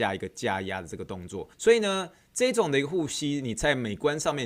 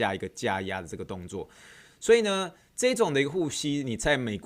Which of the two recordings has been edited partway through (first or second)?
first